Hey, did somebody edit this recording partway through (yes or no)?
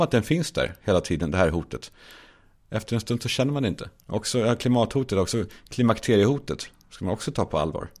yes